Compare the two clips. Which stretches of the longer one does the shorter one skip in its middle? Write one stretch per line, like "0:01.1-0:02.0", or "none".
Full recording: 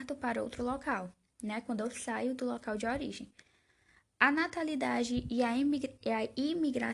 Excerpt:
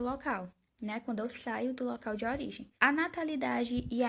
0:03.4-0:04.1